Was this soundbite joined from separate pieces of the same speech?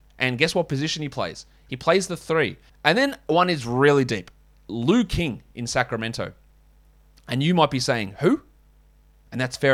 yes; 1 cut; at 2.7 s

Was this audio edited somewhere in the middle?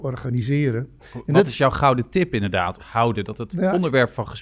yes; 1 cut; at 2.8 s

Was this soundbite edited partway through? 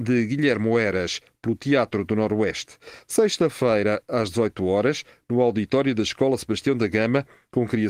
no; 0 cuts

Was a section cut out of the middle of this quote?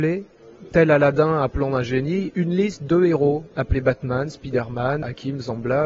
no; 0 cuts

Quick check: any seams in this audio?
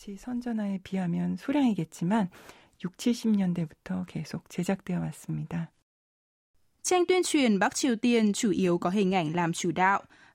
no; 0 cuts

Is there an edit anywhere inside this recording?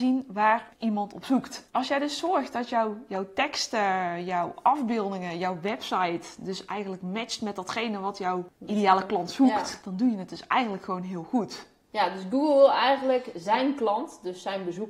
no; 0 cuts

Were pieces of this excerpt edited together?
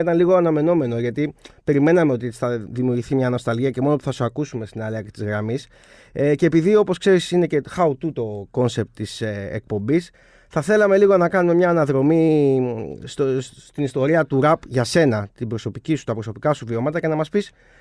no; 0 cuts

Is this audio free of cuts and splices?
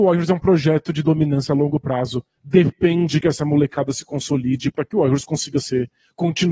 yes; 0 cuts

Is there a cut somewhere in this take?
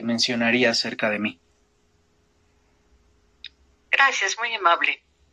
no; 0 cuts

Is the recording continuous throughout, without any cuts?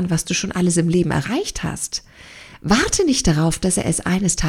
yes; 0 cuts

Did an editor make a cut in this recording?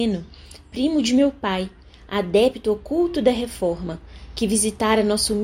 no; 0 cuts

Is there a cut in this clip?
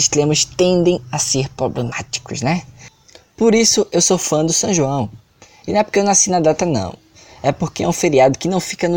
no; 0 cuts

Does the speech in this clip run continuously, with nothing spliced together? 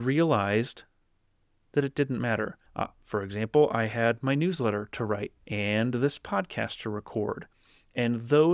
no; 2 cuts; at 2.7 s, 5.4 s

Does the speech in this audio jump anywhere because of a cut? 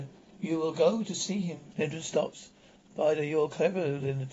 yes; 1 cut; at 1.7 s

